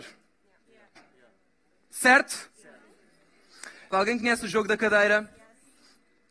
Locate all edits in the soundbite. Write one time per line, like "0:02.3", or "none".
0:01.0
0:03.9